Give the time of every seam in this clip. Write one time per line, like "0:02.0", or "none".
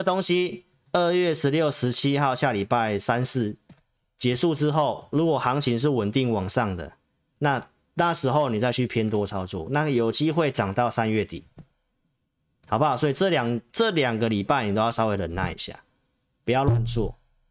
none